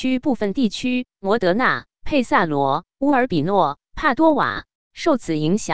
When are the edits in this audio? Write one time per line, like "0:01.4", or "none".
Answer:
0:04.7